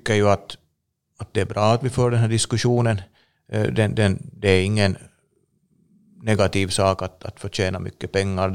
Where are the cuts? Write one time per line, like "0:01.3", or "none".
none